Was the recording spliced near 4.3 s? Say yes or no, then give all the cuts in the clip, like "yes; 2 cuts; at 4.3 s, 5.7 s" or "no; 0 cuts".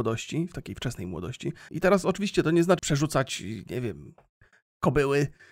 no; 2 cuts; at 1.7 s, 2.8 s